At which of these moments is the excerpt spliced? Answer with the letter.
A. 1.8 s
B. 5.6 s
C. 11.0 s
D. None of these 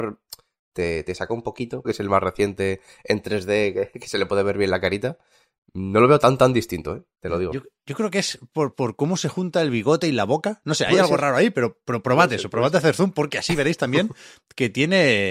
A